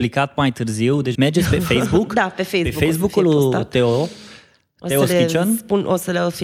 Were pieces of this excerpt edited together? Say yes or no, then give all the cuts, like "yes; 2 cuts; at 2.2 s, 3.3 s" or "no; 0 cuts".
yes; 1 cut; at 1.1 s